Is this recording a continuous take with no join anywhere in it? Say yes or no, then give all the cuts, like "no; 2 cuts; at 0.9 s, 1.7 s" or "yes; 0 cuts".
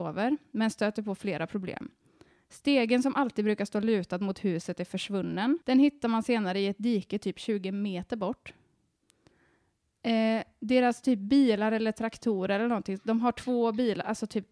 no; 1 cut; at 5.6 s